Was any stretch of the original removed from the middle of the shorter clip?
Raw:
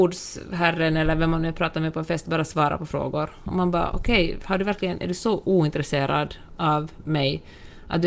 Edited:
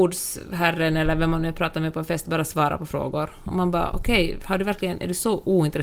no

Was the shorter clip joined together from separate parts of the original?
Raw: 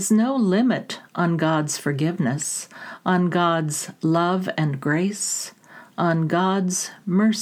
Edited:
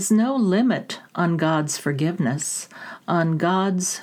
yes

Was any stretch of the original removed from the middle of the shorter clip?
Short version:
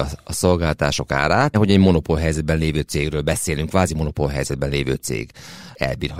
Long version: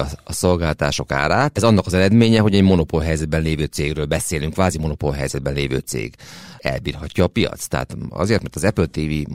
yes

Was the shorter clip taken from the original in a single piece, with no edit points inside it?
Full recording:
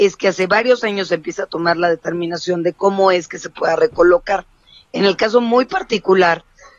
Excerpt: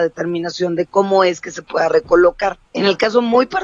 no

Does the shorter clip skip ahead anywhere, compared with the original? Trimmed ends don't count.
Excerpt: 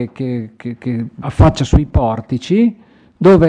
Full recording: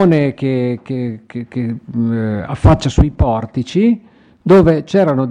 yes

